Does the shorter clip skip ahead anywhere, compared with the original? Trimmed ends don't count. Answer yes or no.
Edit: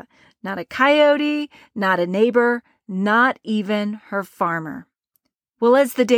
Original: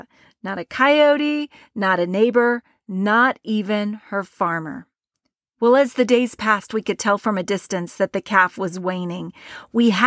no